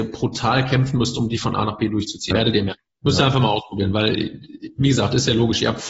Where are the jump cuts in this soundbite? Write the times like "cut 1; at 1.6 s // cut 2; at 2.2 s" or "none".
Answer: cut 1; at 2.3 s